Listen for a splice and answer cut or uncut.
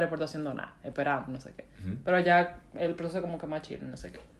uncut